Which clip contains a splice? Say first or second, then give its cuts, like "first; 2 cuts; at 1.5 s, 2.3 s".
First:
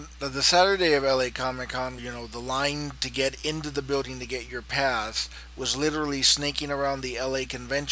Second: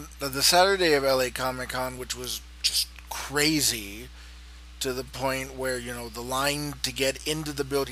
first; 1 cut; at 2.0 s